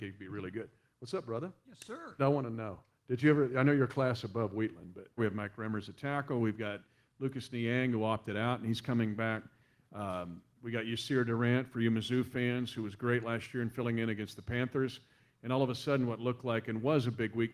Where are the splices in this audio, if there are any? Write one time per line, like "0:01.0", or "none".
0:02.2
0:05.2